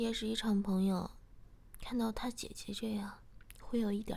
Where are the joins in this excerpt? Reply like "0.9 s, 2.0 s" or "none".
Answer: none